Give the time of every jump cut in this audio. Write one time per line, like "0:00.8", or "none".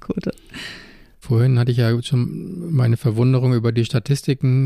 0:01.2